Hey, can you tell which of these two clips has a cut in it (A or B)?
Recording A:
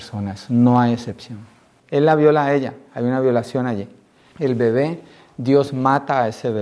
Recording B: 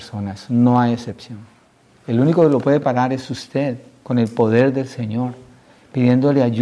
A